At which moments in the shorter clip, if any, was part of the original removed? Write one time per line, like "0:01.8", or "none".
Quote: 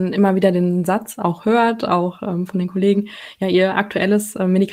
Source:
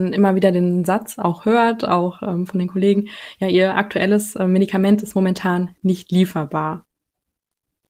none